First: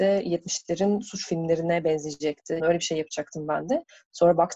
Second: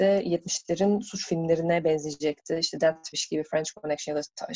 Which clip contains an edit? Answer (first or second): first